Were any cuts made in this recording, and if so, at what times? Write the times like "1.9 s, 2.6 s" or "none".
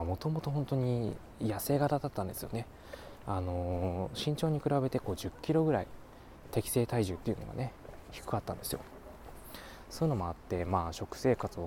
none